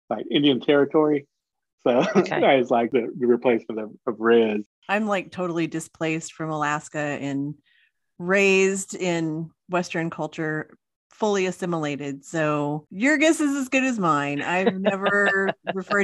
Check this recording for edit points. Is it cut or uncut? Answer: uncut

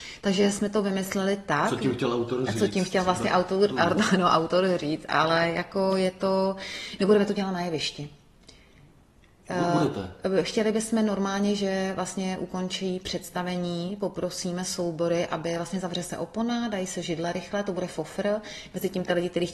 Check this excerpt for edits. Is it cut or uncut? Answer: uncut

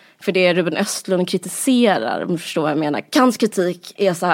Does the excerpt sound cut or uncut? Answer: uncut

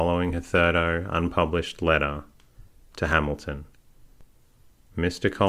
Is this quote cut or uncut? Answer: uncut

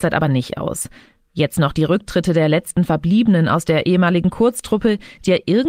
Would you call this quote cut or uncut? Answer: uncut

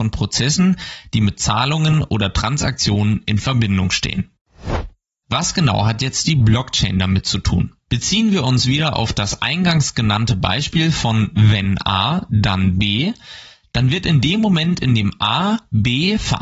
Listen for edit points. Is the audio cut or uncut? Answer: cut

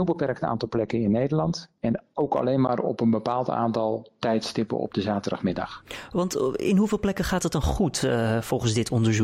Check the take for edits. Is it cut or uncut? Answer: uncut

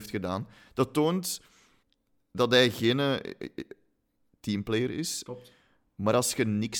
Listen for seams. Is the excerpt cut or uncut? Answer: cut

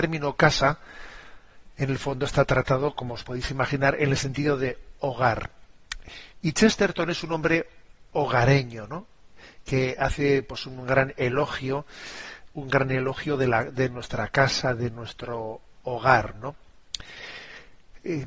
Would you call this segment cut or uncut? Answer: uncut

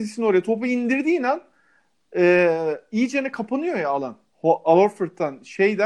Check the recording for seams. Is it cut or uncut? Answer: cut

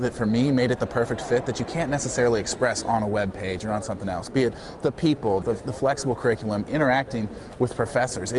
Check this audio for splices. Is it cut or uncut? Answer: cut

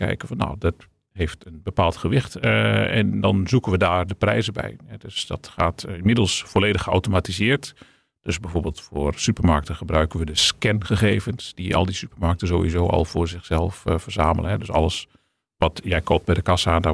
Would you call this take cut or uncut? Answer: uncut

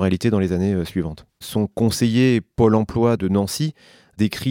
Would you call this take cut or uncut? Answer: cut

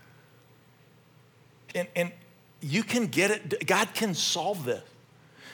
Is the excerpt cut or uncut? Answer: cut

